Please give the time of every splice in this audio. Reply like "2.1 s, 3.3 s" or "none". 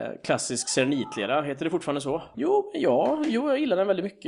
2.3 s